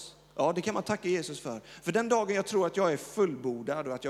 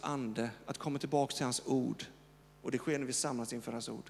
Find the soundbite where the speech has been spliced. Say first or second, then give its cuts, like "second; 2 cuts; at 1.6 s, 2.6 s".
second; 1 cut; at 2.4 s